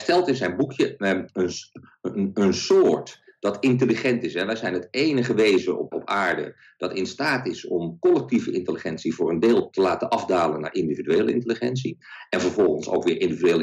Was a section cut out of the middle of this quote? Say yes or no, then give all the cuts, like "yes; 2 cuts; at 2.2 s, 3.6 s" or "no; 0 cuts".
yes; 1 cut; at 5.9 s